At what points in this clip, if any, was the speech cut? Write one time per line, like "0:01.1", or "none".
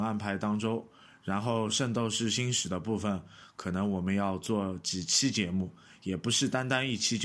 none

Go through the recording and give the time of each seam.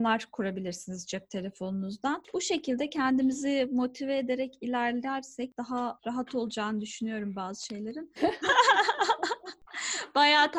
0:08.2

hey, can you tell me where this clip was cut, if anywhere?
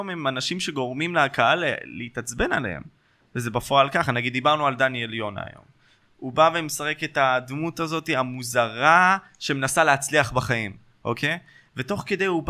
0:06.0

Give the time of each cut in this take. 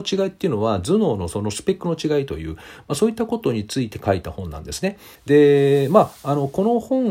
0:05.2

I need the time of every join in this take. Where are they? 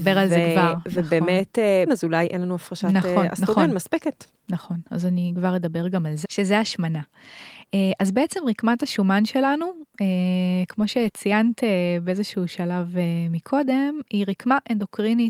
0:01.9
0:06.2

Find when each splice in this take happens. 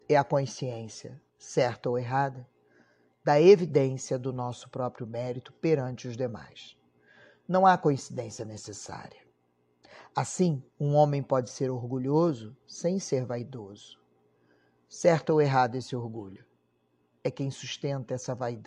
none

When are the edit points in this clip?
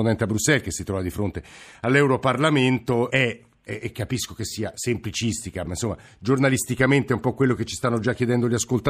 0:03.1
0:05.6

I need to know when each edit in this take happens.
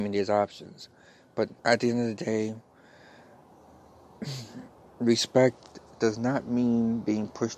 0:01.6

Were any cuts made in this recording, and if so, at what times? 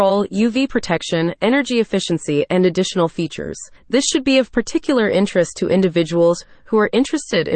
0:03.8

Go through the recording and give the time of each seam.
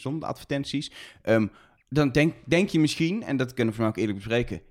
none

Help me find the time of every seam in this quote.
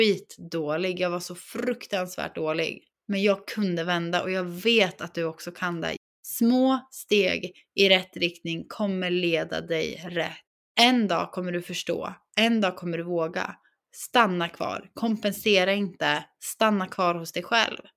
none

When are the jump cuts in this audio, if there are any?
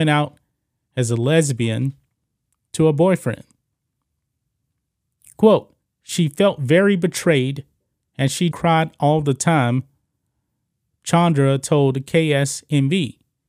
0:08.5

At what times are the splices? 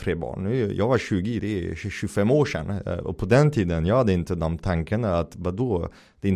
0:01.4

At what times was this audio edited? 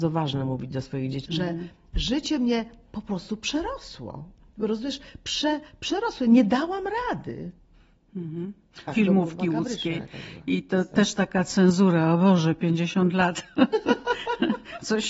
0:01.2
0:08.9

